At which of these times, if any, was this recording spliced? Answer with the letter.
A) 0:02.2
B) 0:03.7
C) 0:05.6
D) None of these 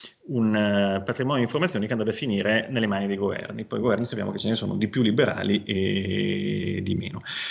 D